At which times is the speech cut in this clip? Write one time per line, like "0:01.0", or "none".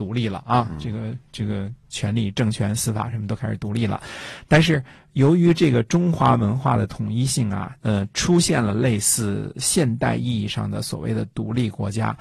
0:07.8